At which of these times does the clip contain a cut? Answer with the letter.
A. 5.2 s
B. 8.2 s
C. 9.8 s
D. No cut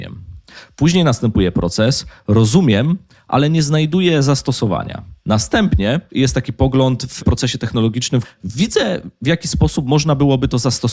B